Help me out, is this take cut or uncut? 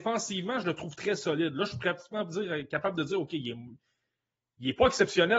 uncut